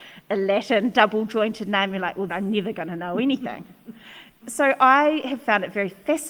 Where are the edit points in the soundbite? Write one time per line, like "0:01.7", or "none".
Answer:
0:02.3
0:04.4